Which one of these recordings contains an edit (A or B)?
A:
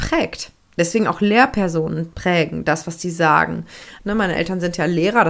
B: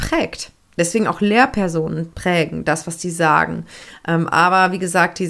A